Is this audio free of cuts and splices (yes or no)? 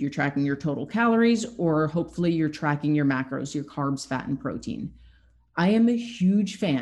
yes